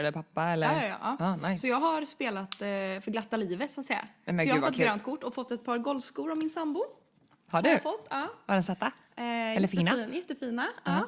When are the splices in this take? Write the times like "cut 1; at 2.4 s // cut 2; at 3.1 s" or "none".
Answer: none